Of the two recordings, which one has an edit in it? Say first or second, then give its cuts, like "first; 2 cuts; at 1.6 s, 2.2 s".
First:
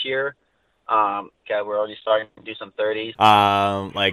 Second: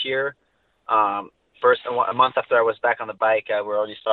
first; 2 cuts; at 1.4 s, 3.1 s